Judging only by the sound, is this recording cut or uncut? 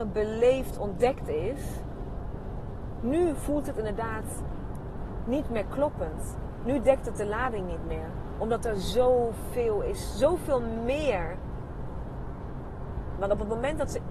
cut